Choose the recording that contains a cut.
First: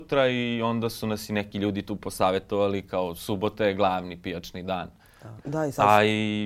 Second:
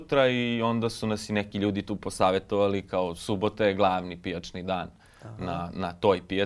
first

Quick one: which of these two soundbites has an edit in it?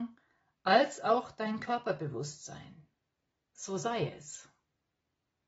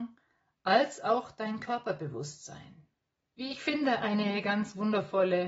second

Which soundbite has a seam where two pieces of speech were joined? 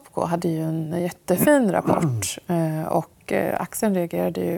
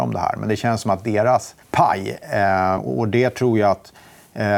second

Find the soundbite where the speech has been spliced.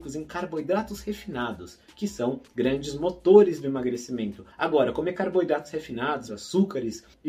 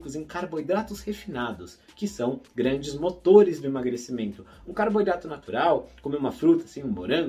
first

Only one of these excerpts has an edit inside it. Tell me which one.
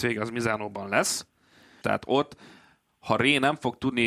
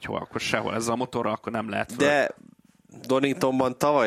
first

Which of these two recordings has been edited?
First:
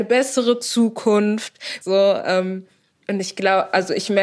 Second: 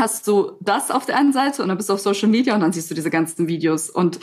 first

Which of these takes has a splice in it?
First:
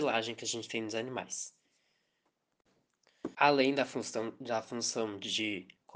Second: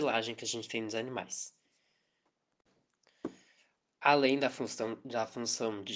first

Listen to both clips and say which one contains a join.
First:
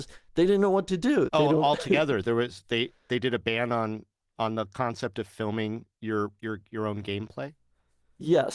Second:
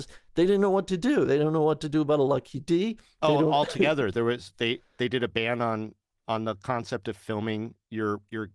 first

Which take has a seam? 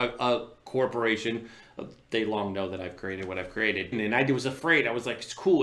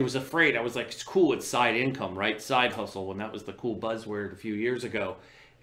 first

